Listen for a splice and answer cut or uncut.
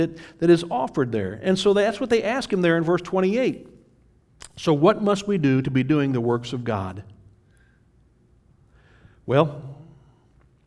uncut